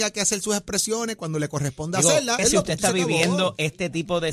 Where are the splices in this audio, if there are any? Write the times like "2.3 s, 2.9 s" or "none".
2.4 s